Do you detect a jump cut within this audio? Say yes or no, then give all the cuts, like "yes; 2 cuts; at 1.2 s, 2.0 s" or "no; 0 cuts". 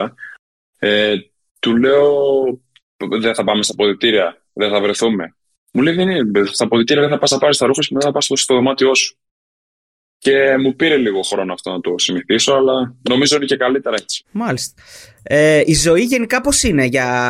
no; 0 cuts